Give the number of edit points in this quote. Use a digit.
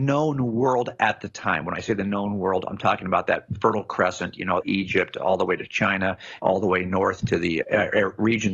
3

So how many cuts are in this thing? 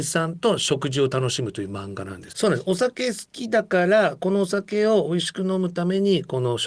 1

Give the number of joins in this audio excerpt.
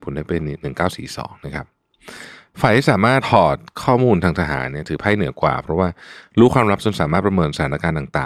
1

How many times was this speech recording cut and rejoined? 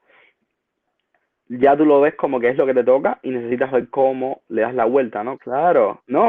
1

